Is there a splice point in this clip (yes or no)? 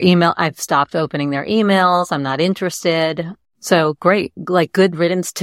yes